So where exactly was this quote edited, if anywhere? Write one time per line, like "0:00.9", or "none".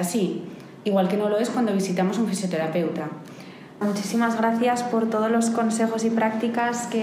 0:03.8